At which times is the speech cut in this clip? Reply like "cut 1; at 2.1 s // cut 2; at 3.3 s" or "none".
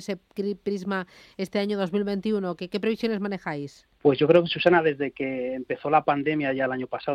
cut 1; at 3.9 s